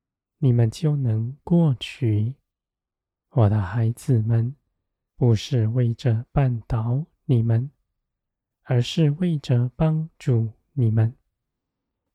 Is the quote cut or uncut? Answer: cut